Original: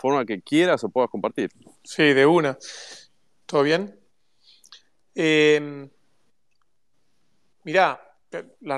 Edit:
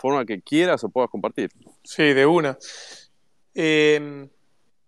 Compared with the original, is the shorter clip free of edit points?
no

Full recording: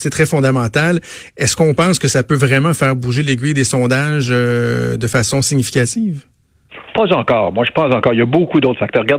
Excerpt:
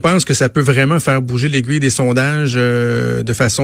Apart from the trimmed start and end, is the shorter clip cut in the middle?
no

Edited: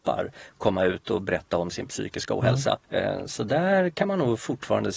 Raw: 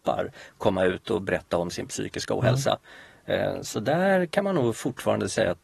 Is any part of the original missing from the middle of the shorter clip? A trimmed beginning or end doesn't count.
yes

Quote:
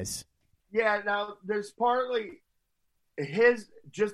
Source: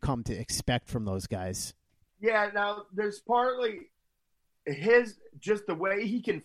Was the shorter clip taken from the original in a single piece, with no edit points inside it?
yes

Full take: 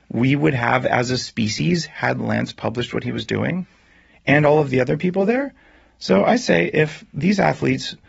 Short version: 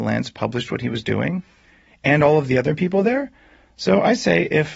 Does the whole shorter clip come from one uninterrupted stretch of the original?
yes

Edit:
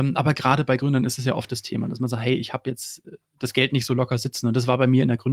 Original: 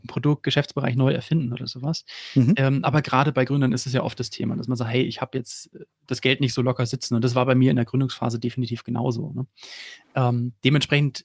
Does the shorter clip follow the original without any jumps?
yes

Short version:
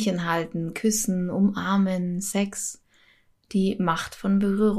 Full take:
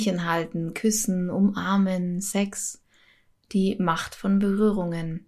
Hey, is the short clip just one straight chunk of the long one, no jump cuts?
yes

